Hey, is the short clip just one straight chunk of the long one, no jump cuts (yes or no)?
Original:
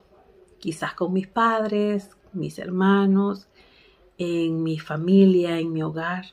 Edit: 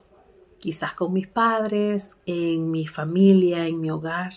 no